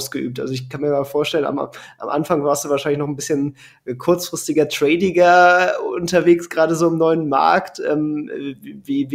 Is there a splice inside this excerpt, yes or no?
no